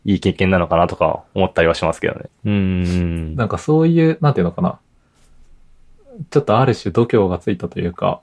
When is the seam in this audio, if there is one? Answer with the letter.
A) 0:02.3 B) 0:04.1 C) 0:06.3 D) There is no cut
A